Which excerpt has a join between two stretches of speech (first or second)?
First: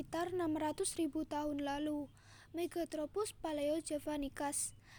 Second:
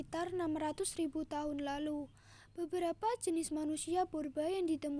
first